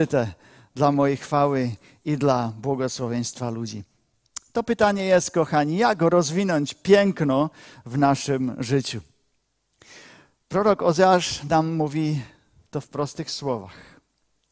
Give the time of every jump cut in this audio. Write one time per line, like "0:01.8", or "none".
none